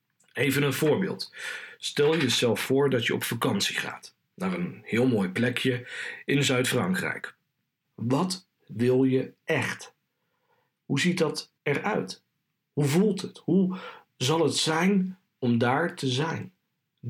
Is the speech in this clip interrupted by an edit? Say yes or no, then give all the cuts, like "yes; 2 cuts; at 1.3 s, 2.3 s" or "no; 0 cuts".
yes; 2 cuts; at 7.8 s, 11.6 s